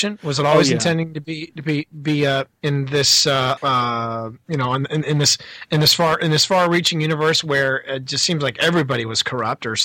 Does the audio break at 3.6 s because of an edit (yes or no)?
yes